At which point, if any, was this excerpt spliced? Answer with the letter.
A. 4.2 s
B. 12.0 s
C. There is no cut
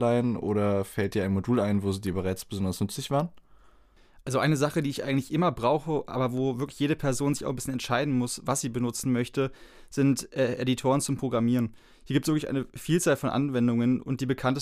C